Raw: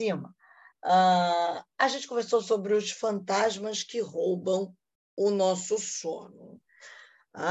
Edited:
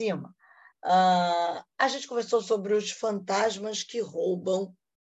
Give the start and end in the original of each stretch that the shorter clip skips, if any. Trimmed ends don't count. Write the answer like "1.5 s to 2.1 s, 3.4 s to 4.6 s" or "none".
none

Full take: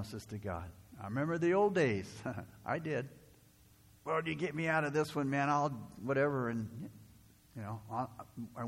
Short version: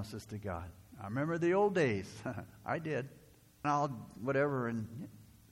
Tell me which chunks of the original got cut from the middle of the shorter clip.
3.6 s to 5.5 s

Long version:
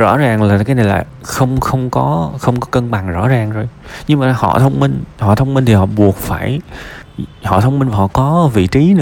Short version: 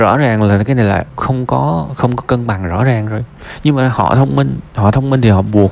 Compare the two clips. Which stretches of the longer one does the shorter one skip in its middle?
1.2 s to 1.6 s

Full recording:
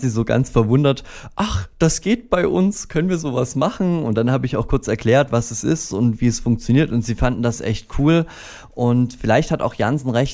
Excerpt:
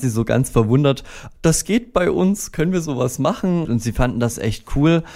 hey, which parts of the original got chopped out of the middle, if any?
1.3 s to 1.7 s, 4.0 s to 6.9 s

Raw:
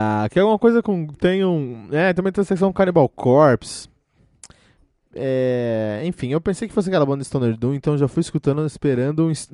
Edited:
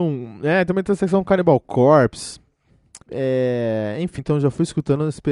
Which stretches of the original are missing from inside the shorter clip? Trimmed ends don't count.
4.5 s to 5.1 s, 6.2 s to 7.8 s

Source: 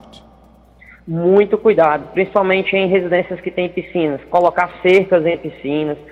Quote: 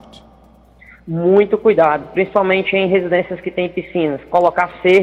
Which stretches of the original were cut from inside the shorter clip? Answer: none

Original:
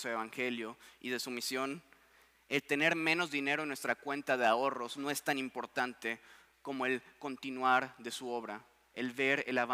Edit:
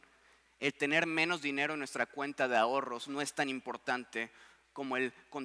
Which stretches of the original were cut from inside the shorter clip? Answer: none

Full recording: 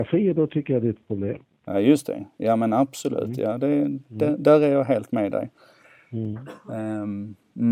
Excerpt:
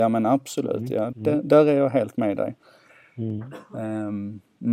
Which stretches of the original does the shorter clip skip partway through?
3.6 s to 4.1 s

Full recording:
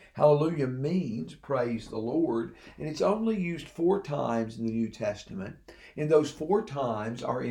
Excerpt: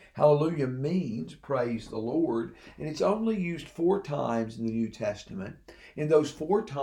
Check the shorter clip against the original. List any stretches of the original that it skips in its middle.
none

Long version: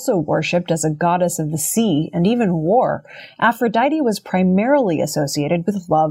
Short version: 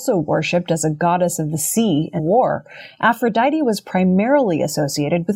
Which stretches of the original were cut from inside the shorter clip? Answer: 2.2 s to 2.6 s

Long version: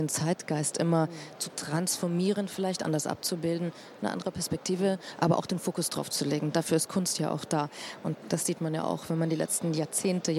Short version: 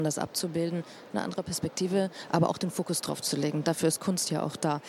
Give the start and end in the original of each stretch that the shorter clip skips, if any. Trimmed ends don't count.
none

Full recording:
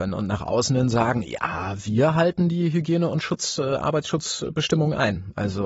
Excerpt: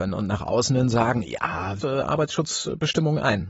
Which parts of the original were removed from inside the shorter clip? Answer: 1.8 s to 3.6 s

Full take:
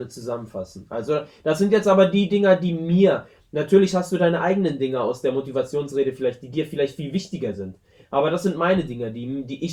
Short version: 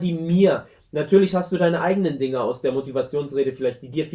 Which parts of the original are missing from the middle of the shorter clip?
none

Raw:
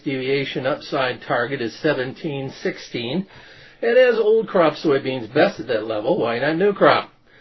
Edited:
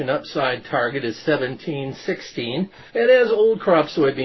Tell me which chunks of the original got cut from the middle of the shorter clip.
3.4 s to 3.8 s

